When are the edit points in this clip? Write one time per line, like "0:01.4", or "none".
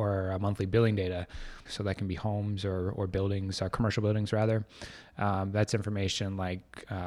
0:01.7